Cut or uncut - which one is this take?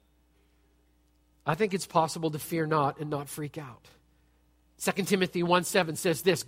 uncut